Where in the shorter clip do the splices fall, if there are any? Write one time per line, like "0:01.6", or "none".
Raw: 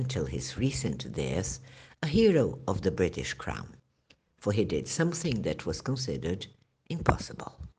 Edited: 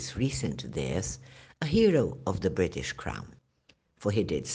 none